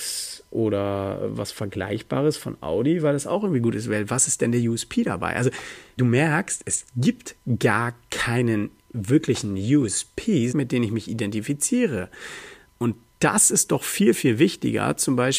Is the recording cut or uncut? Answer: cut